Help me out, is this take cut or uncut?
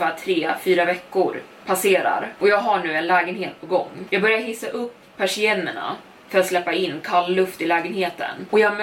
cut